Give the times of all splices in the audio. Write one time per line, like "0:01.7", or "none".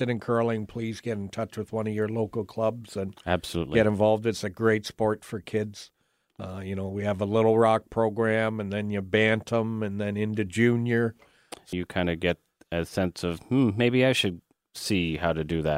0:11.7

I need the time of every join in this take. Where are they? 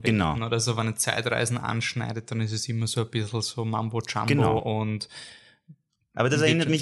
none

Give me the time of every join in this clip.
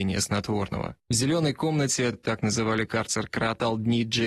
none

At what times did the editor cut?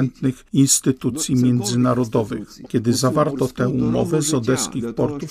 0:02.6

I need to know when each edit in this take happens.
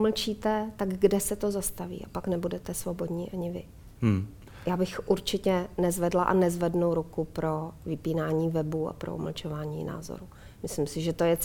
0:03.9

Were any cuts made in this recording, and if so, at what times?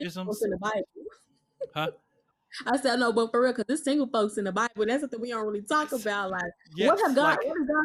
none

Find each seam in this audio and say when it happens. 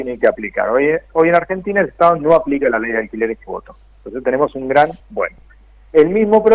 0:05.0

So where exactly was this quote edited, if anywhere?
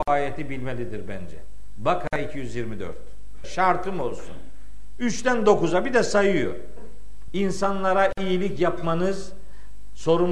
0:03.4
0:07.3

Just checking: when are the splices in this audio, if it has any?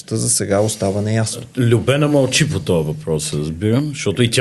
none

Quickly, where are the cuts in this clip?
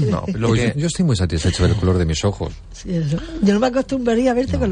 none

